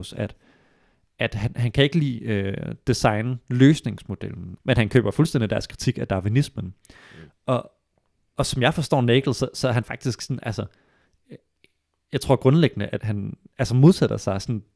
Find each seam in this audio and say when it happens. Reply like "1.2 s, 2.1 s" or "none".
4.6 s, 7.3 s, 13.0 s